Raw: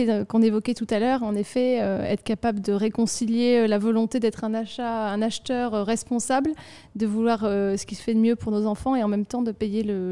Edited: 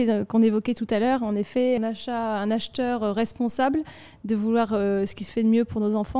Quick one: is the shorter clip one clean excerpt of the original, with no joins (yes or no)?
no